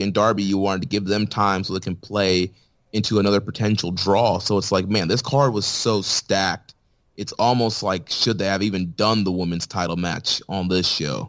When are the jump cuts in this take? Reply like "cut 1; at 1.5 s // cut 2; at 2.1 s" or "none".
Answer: none